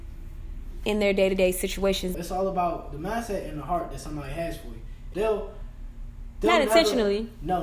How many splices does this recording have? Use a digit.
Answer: 2